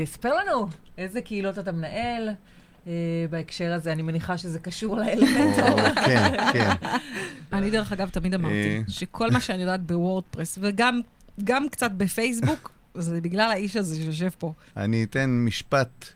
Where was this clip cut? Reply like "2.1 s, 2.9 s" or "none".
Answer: 7.5 s, 14.7 s